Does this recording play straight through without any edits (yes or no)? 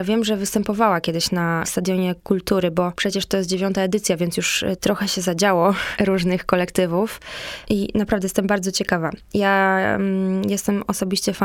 no